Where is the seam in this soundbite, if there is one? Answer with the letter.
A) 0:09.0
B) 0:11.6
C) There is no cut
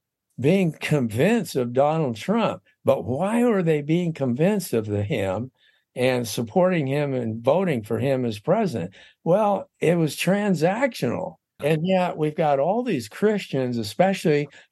B